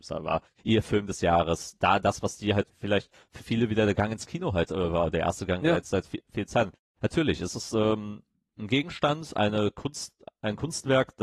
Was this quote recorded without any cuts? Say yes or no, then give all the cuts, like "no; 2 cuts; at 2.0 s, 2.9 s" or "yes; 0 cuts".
yes; 0 cuts